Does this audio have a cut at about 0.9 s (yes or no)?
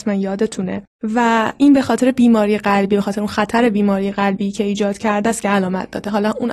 yes